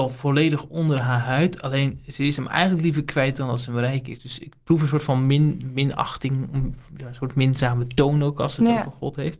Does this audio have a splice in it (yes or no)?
no